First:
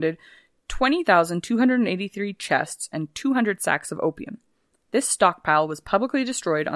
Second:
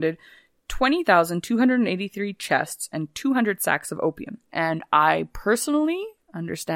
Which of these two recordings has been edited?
second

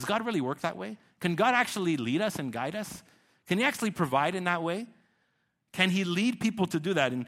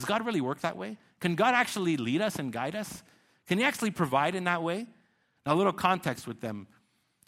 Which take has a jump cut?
second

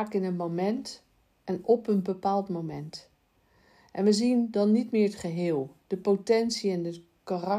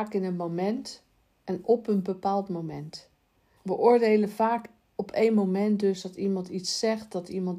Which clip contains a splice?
second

